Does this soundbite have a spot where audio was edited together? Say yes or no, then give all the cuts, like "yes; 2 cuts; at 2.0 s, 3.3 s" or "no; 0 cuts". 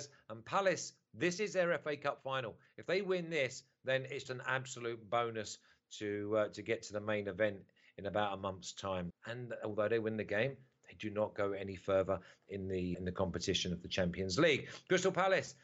yes; 3 cuts; at 4.3 s, 9.1 s, 12.9 s